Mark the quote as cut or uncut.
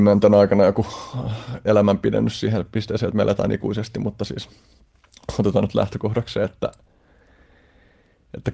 uncut